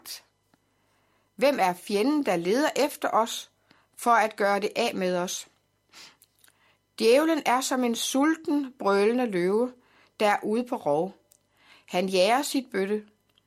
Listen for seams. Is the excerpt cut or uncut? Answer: uncut